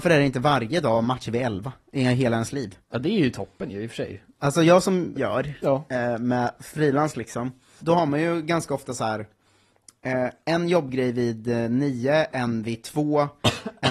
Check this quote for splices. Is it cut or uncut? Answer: cut